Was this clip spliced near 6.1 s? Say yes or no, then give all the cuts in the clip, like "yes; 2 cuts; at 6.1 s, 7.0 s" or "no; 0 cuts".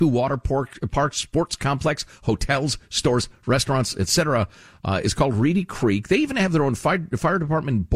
no; 0 cuts